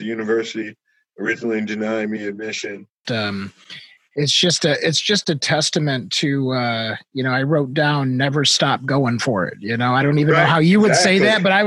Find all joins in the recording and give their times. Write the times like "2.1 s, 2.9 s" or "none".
3.0 s